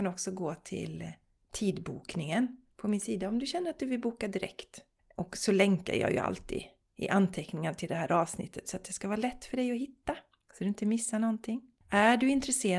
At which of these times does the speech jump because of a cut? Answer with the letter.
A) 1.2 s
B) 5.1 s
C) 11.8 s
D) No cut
C